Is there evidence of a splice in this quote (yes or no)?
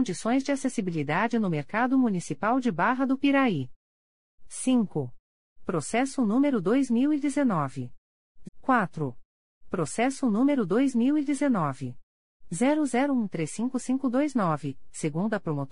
yes